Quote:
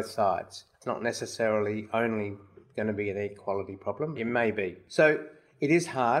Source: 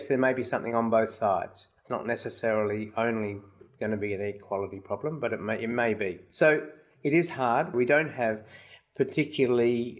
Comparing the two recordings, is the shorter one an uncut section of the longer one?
no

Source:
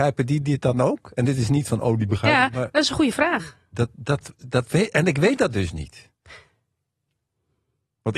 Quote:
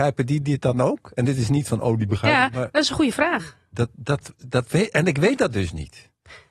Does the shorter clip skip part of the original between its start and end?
no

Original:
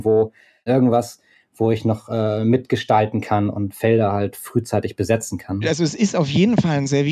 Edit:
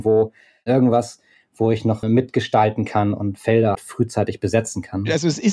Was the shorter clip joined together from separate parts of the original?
yes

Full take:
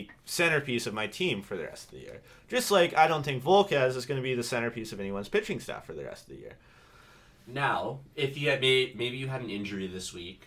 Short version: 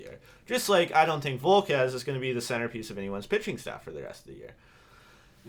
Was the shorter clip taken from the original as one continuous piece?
yes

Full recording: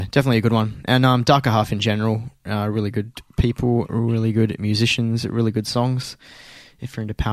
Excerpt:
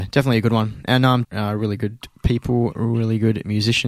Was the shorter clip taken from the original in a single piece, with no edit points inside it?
no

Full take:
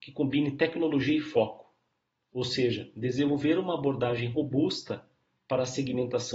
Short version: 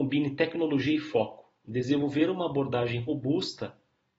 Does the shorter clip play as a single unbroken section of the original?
no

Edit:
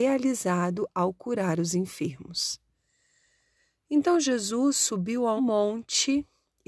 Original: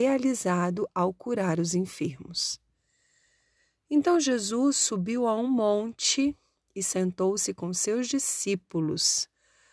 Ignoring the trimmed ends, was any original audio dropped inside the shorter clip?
yes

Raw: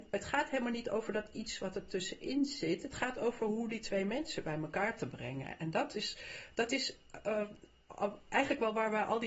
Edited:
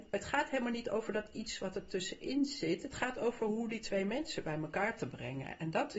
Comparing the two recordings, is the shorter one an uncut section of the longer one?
yes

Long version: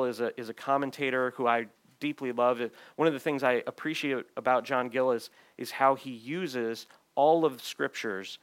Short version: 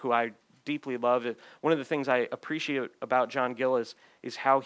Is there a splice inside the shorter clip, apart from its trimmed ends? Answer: no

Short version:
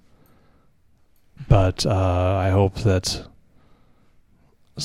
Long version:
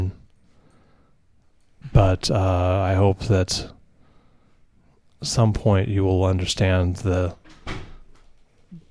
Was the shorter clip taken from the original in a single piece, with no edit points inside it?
yes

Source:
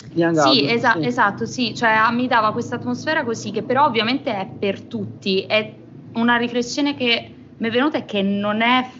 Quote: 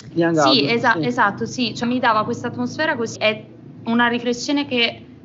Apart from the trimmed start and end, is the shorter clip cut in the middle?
yes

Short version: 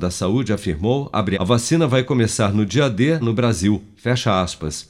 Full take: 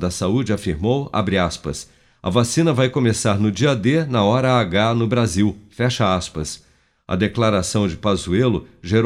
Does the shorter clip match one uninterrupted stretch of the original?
no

